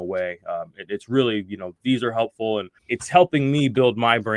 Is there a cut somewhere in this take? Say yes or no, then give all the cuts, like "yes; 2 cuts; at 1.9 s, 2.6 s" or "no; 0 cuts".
yes; 1 cut; at 2.8 s